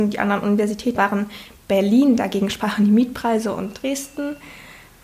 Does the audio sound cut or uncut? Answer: cut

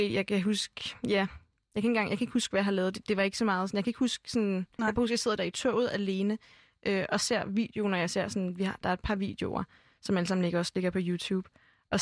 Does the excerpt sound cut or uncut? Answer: uncut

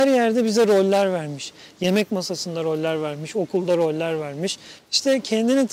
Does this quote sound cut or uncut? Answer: cut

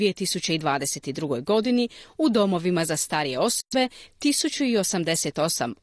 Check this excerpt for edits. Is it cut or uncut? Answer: uncut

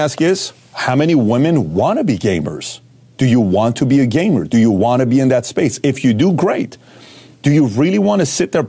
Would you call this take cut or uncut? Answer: uncut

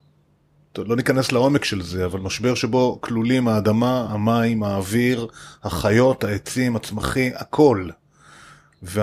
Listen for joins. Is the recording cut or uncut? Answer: uncut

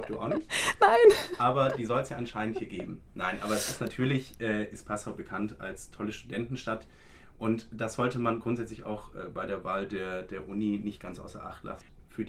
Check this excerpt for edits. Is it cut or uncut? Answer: uncut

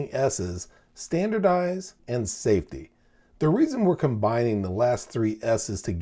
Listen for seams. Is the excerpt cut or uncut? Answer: cut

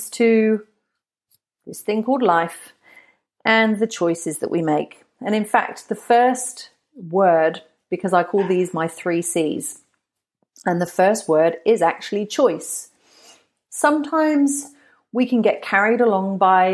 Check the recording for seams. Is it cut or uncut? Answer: uncut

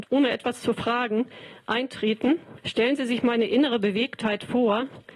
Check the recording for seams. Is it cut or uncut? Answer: cut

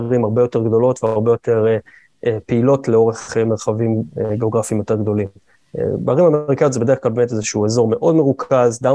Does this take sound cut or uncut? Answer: uncut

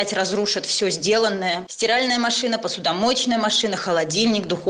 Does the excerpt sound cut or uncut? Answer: cut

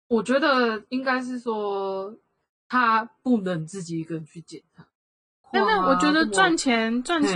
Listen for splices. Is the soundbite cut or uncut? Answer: cut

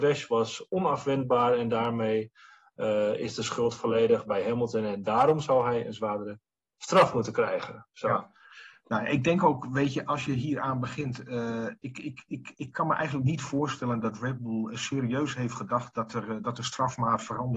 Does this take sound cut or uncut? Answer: uncut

